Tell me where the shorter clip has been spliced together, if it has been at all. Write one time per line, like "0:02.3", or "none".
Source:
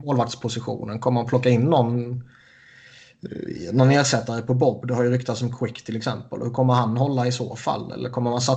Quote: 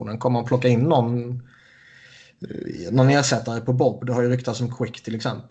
none